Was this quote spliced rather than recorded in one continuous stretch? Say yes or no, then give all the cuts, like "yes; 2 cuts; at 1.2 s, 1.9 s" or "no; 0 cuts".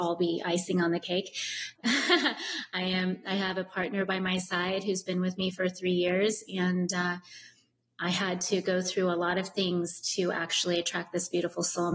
yes; 1 cut; at 1.8 s